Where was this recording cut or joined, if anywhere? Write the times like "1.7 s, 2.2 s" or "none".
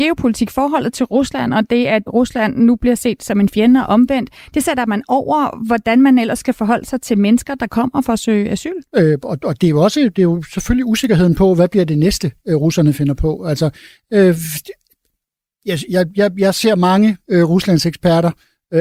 8.9 s